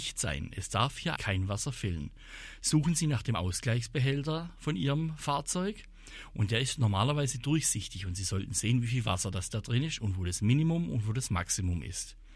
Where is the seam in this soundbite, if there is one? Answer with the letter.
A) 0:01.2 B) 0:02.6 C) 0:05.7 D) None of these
A